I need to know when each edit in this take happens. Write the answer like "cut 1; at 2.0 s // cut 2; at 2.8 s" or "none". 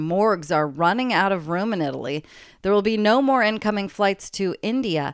none